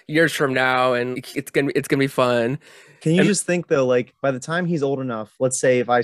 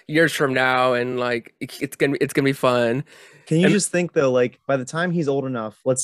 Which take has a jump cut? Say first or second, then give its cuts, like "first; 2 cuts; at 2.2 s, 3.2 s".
first; 1 cut; at 1.1 s